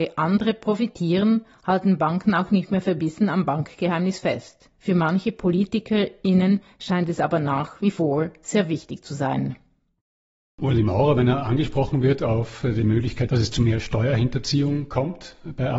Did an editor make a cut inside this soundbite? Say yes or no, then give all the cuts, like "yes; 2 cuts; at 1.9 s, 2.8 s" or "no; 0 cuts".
no; 0 cuts